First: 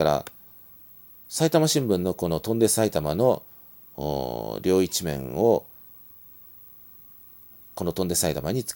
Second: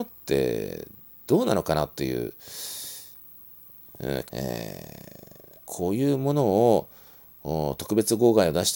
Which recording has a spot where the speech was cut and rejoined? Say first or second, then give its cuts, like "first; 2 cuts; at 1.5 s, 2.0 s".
second; 2 cuts; at 4.3 s, 5.6 s